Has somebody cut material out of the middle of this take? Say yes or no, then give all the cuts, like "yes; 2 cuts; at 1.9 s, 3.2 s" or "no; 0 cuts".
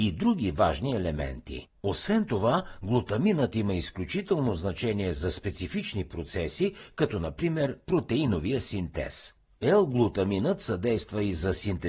no; 0 cuts